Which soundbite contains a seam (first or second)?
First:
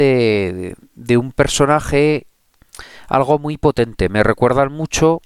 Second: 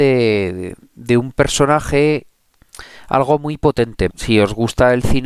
second